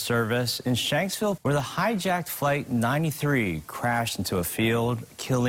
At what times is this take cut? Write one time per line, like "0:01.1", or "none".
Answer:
0:01.4